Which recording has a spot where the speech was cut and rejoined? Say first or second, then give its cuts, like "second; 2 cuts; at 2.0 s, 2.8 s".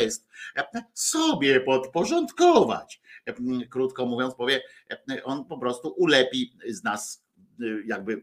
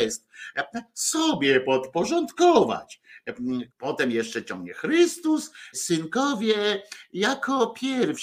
second; 2 cuts; at 3.7 s, 5.7 s